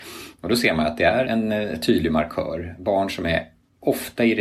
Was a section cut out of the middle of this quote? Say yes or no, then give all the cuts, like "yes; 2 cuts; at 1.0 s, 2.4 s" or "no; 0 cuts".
yes; 1 cut; at 1.2 s